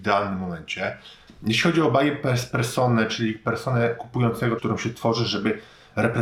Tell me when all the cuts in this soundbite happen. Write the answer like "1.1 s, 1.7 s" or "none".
1.3 s, 4.6 s